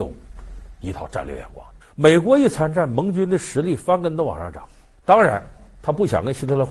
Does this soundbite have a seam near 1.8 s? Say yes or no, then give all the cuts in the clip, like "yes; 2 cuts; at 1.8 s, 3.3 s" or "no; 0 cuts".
yes; 2 cuts; at 1.8 s, 5.0 s